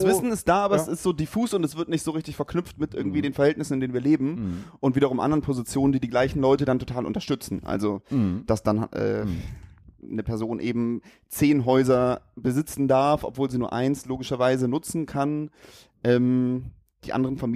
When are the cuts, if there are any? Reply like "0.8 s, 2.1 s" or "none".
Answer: none